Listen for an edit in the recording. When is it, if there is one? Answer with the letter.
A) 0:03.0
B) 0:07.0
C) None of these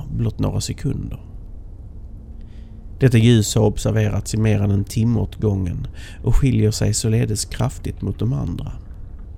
A